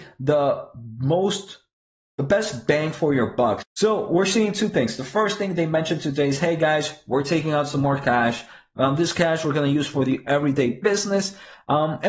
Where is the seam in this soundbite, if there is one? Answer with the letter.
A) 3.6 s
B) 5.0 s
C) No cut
A